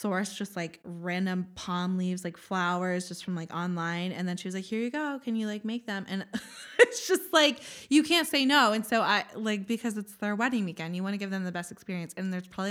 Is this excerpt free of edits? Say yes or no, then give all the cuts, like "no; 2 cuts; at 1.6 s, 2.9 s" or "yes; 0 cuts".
yes; 0 cuts